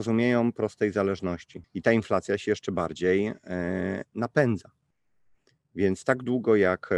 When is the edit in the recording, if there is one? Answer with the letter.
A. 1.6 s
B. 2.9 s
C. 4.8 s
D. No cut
A